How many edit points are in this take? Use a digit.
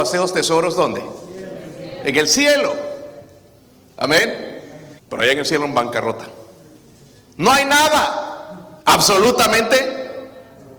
2